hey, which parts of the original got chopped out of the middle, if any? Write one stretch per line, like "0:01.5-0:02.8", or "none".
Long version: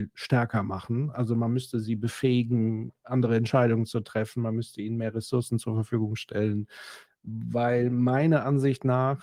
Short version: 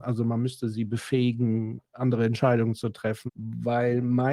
0:04.4-0:07.1

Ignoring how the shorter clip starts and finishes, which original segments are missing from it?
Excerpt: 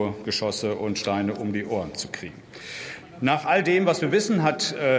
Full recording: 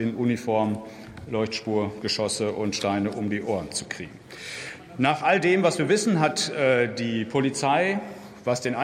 none

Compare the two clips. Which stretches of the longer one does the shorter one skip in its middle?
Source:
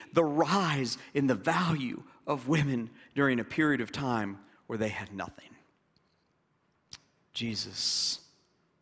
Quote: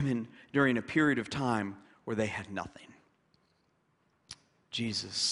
none

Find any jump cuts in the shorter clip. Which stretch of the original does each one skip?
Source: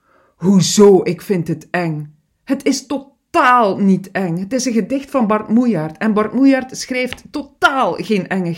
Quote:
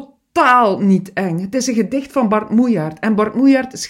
none

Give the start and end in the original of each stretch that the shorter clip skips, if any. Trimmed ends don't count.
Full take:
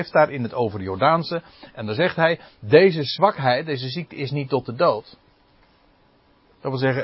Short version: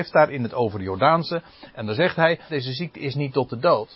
0:02.5-0:03.7

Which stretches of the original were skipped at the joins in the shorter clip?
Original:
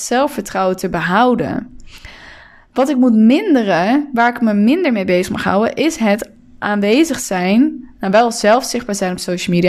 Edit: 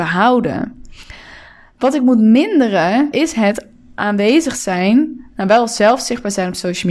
0:04.1-0:05.8

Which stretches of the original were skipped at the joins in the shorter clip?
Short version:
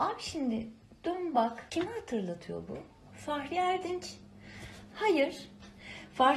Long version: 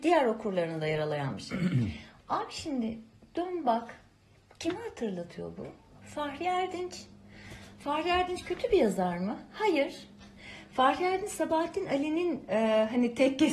0:04.0-0:04.6
0:07.8-0:09.5

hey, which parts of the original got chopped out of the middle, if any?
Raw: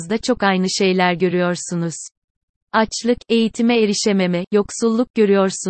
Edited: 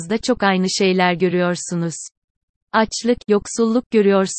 0:03.2-0:04.5

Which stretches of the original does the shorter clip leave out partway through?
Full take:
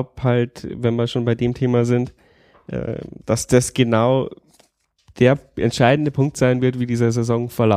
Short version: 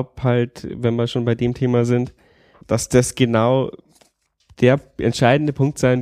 0:02.6-0:03.2

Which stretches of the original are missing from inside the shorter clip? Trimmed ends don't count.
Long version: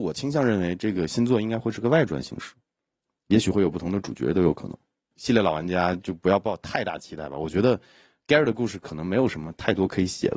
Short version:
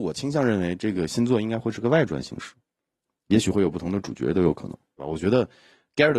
0:05.0-0:07.3

